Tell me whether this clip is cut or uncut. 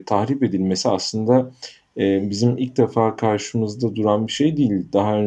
uncut